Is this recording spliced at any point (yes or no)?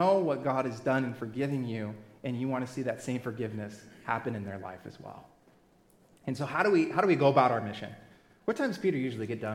no